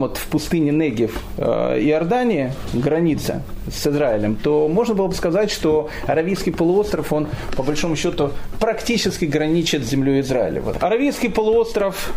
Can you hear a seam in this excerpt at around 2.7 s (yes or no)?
no